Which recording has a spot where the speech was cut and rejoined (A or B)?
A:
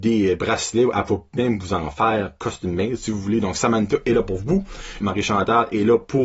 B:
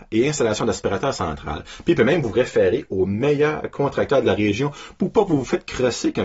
A